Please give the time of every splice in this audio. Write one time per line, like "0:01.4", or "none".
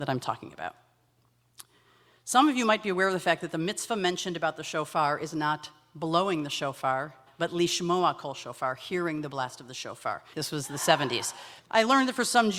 0:07.3
0:10.3
0:11.6